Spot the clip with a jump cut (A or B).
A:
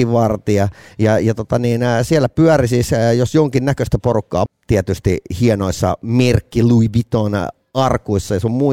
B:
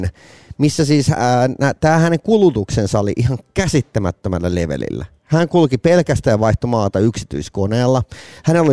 A